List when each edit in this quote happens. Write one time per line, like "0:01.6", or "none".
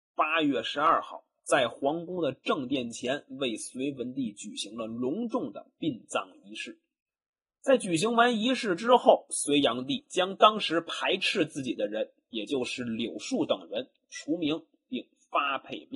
none